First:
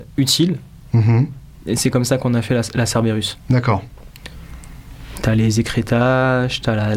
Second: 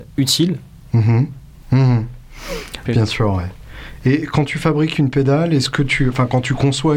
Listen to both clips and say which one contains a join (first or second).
second